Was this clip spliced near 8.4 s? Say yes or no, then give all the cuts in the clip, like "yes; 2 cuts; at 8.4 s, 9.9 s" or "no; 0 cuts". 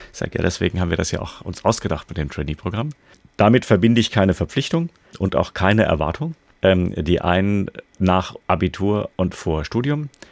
yes; 2 cuts; at 6.5 s, 8.4 s